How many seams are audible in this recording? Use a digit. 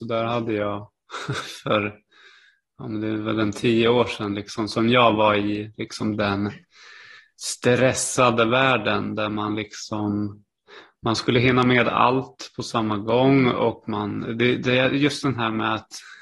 0